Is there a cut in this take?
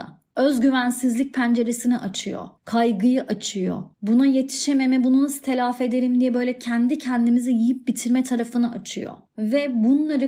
yes; 1 cut; at 3.9 s

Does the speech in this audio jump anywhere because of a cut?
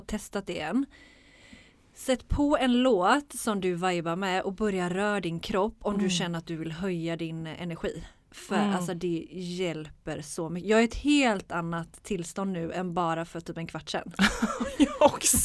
no; 0 cuts

